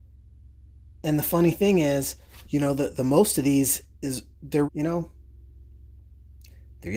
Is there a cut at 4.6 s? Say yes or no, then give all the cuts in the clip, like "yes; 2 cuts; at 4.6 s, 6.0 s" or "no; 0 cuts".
yes; 1 cut; at 4.6 s